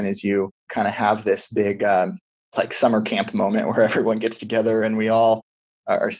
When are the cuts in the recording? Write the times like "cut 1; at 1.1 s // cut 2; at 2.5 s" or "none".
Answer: none